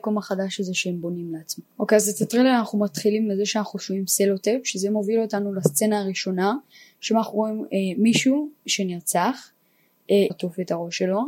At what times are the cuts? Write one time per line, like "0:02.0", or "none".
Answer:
0:01.7
0:10.3